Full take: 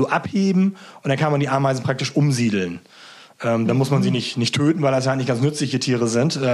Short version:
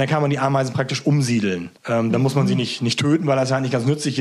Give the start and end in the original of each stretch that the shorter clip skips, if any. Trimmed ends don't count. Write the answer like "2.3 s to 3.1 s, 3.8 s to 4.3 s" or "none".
2.9 s to 3.3 s